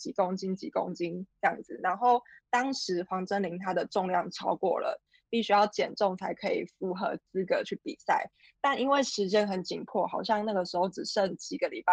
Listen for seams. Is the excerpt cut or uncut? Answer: uncut